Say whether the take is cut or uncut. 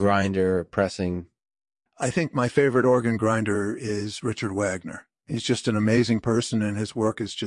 uncut